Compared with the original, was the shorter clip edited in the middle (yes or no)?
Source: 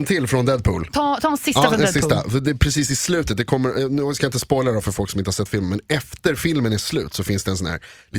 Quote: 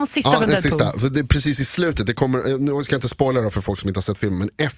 no